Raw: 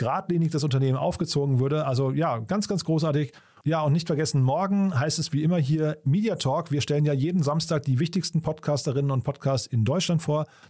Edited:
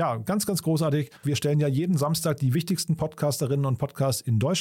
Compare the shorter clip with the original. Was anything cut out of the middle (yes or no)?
yes